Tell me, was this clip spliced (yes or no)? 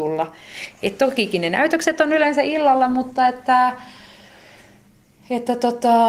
no